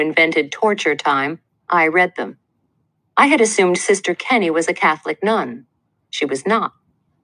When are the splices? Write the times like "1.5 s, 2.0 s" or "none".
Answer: none